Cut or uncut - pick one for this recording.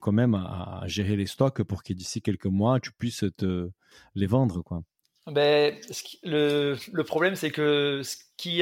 uncut